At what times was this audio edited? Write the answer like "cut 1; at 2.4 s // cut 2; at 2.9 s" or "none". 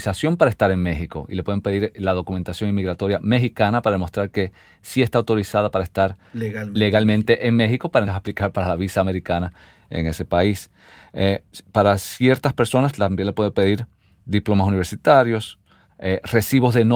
cut 1; at 8.0 s // cut 2; at 15.9 s